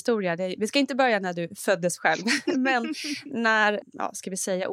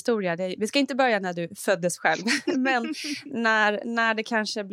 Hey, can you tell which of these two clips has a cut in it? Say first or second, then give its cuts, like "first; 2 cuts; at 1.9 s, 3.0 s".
first; 1 cut; at 3.8 s